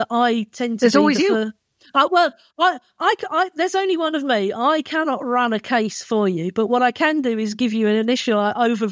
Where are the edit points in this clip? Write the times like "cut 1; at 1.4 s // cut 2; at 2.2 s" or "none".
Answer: none